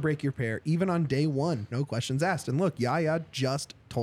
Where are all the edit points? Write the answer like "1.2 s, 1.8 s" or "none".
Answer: 1.7 s